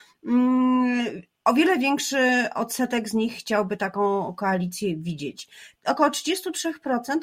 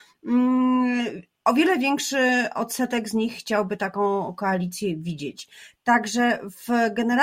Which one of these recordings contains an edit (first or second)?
first